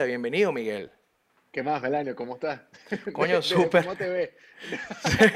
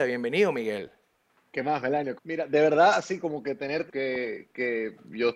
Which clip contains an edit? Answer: second; 2 cuts; at 2.2 s, 3.9 s

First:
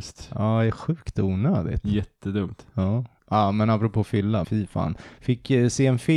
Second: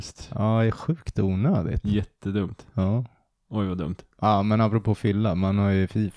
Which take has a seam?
first; 2 cuts; at 3.2 s, 4.4 s

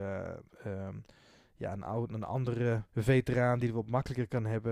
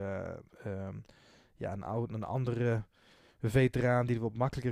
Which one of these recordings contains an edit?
first; 1 cut; at 2.9 s

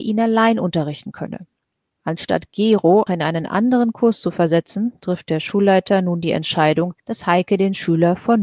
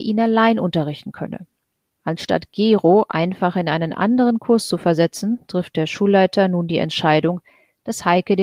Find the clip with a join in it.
first; 2 cuts; at 3.1 s, 7.0 s

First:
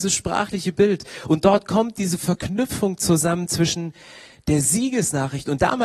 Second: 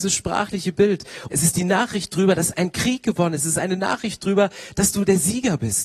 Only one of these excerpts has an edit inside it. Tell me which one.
second; 1 cut; at 1.3 s

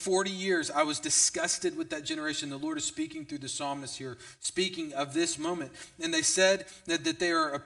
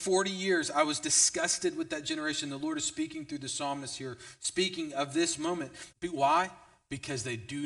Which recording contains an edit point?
second; 1 cut; at 5.9 s

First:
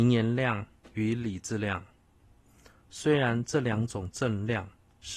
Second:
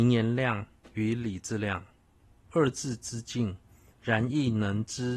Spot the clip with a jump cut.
second; 2 cuts; at 2.4 s, 3.9 s

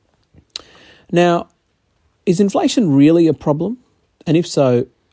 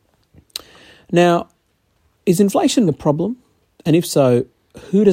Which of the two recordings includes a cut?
second; 1 cut; at 2.9 s

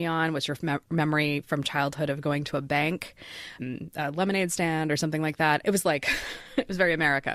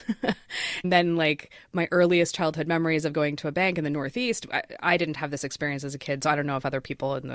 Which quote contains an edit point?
first; 2 cuts; at 3.6 s, 5.6 s

